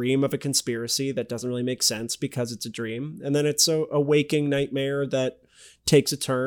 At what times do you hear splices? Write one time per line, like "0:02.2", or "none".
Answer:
none